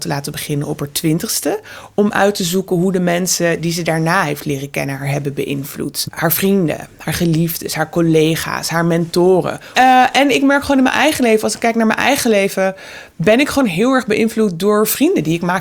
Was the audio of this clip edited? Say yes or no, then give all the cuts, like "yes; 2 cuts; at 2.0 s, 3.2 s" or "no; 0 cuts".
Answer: yes; 2 cuts; at 6.0 s, 9.7 s